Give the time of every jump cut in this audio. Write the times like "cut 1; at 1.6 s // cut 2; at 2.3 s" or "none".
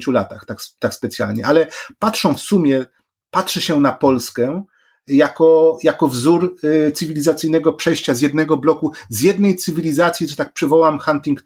none